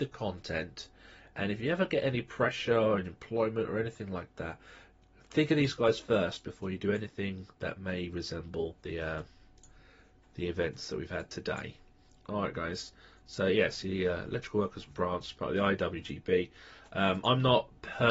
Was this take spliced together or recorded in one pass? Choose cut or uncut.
cut